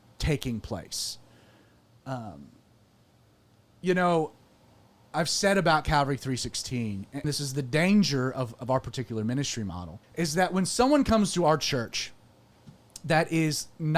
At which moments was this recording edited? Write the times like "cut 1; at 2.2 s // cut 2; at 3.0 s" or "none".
cut 1; at 7.2 s // cut 2; at 10.0 s